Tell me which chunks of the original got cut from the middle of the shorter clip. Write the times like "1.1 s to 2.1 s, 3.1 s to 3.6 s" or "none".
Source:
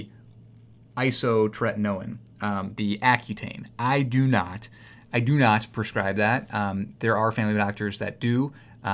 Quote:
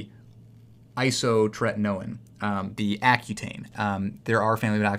3.7 s to 6.5 s

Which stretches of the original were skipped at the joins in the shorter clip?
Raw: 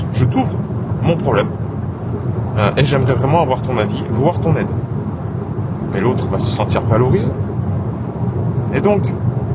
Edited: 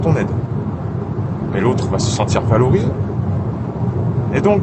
none

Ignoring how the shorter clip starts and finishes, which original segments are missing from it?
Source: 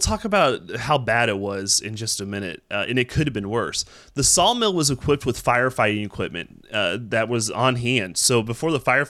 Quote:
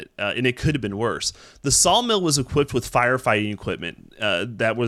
none

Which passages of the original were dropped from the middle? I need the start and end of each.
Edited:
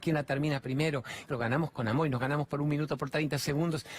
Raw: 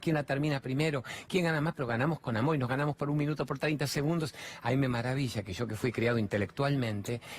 1.3 s to 1.7 s

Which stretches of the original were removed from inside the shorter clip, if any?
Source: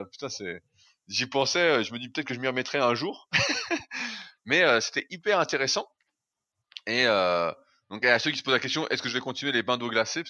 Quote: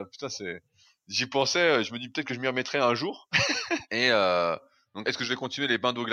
3.9 s to 6.8 s, 8.0 s to 8.9 s

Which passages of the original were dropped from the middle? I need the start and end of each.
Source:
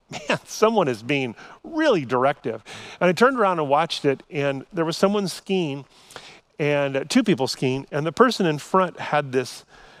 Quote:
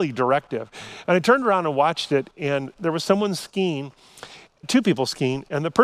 6.6 s to 7.0 s

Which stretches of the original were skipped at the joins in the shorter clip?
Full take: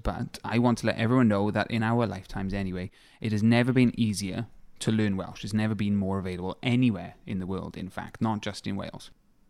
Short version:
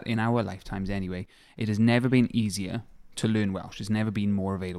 none

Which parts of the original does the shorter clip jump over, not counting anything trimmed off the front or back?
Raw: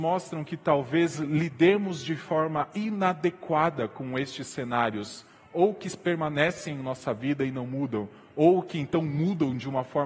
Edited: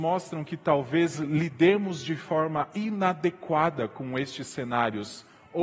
none

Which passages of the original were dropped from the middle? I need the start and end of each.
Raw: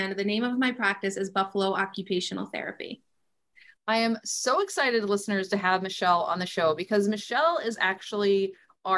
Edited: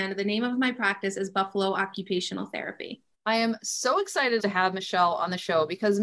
3.1 s to 3.7 s, 5.0 s to 5.5 s

